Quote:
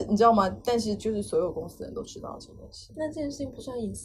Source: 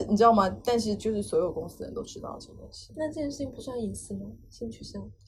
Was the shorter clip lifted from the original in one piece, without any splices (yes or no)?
yes